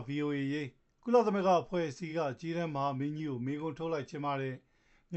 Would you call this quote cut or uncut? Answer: uncut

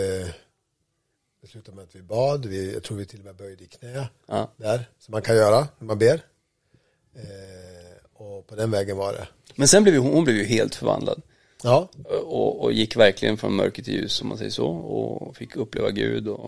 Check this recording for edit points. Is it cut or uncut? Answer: uncut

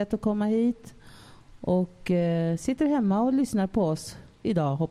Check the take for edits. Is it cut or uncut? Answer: uncut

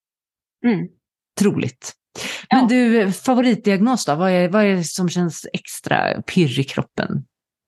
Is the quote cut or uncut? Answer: uncut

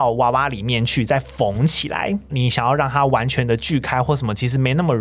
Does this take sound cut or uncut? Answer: cut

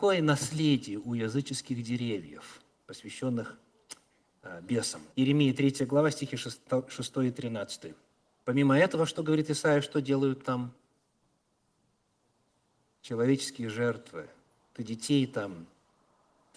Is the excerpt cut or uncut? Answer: cut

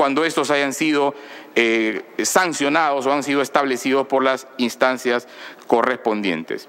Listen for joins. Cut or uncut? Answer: uncut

